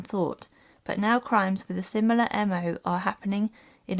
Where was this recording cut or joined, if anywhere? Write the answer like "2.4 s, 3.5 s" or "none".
none